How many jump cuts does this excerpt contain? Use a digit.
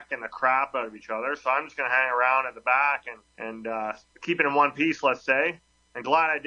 1